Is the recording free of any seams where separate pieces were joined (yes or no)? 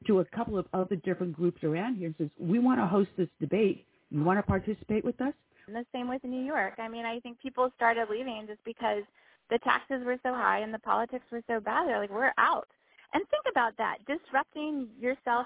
no